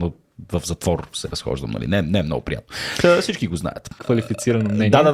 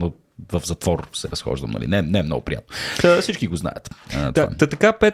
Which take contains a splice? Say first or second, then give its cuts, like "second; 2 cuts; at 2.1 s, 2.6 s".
first; 1 cut; at 4.0 s